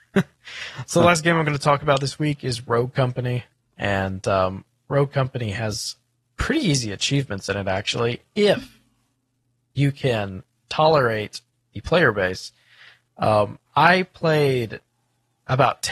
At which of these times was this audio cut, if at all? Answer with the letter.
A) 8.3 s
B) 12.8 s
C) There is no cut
C